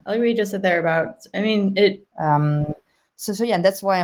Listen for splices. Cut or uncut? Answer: cut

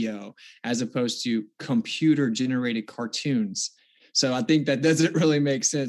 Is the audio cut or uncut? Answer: uncut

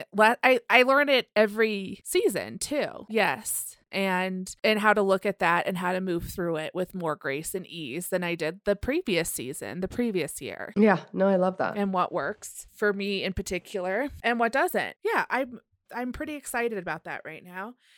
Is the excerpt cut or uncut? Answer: cut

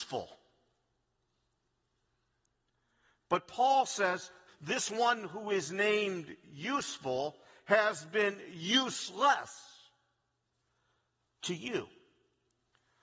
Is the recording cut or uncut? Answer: cut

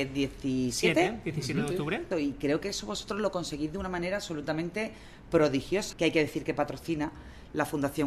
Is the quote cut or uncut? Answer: cut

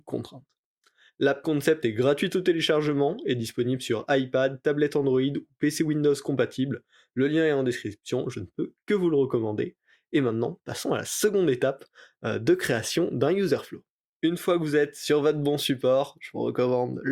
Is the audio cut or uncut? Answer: uncut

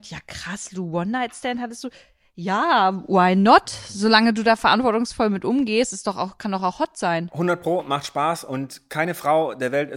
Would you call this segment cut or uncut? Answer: uncut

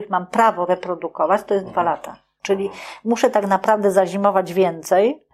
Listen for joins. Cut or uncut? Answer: cut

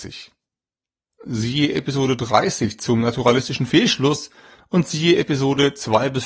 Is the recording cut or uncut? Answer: cut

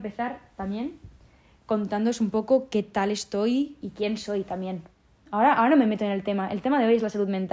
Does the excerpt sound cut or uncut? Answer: cut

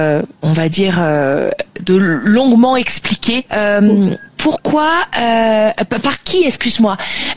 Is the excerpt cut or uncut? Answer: cut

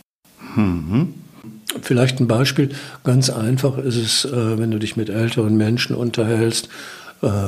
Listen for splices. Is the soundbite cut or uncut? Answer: uncut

